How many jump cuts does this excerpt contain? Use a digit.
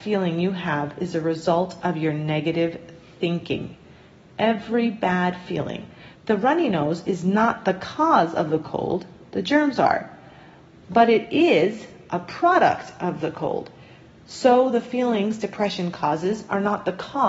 1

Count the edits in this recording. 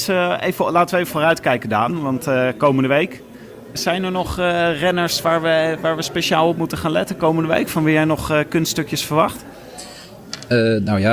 1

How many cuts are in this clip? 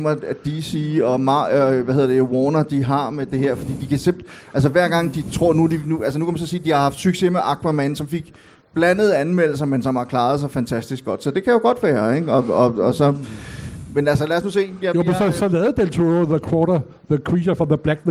0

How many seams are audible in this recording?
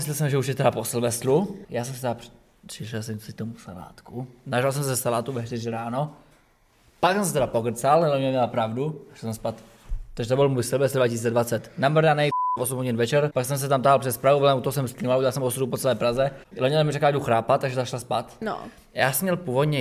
3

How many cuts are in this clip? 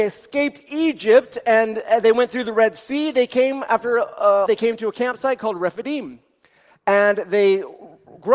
1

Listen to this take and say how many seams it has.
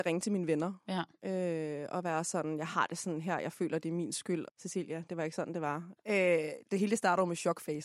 2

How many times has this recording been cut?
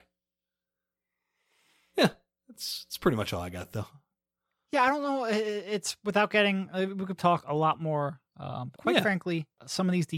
2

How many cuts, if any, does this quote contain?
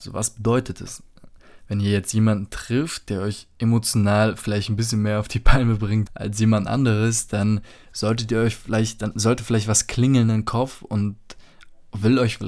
1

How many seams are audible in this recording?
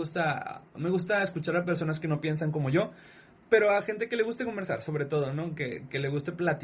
0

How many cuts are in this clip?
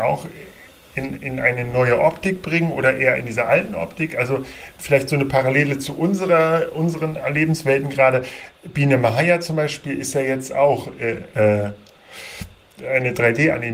2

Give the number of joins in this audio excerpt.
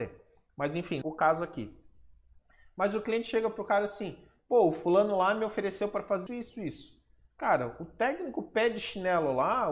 2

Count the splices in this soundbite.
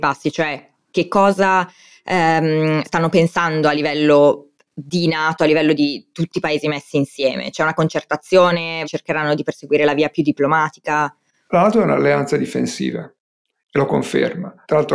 2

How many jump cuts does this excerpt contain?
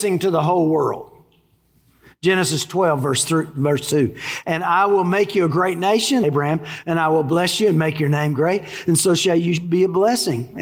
1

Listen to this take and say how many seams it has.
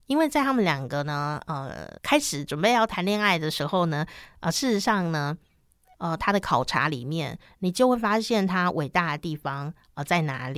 1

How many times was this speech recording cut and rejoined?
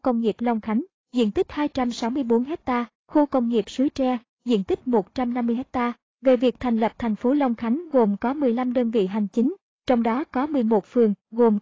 1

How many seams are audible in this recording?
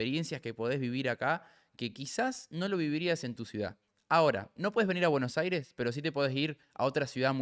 0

